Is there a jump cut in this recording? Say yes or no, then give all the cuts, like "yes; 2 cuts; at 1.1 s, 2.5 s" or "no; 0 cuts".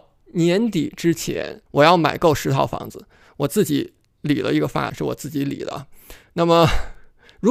yes; 2 cuts; at 1.7 s, 4.9 s